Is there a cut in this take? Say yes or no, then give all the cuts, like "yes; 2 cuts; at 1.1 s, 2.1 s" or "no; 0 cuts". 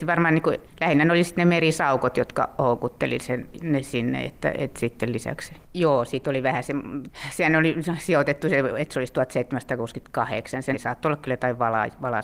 yes; 2 cuts; at 5.6 s, 10.7 s